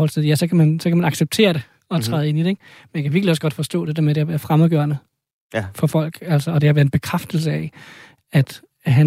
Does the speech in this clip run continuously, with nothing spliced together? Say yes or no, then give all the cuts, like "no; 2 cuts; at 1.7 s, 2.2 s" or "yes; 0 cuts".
yes; 0 cuts